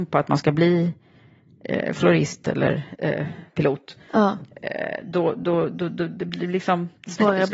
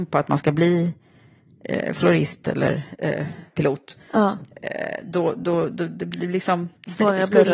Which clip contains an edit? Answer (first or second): second